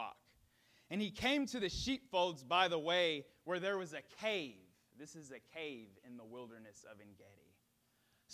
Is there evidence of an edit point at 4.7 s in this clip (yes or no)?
no